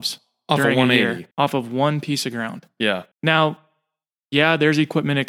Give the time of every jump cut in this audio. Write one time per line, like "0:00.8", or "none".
0:01.3
0:03.1